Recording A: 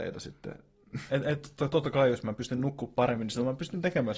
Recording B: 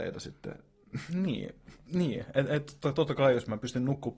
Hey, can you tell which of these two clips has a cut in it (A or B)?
A